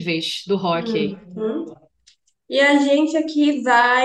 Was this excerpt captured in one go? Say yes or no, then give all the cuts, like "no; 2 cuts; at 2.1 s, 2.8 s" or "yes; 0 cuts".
yes; 0 cuts